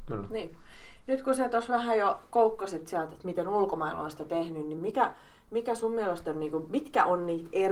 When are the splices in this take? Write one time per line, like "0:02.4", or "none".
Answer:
none